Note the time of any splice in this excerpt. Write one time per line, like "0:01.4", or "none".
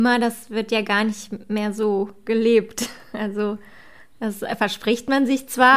none